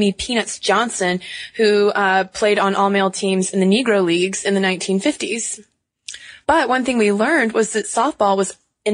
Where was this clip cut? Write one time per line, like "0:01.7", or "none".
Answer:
0:06.4